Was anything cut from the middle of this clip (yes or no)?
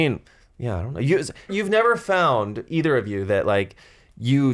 yes